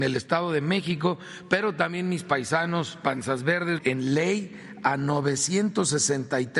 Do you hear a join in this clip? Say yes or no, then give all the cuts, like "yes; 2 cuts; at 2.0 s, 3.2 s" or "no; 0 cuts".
yes; 1 cut; at 3.8 s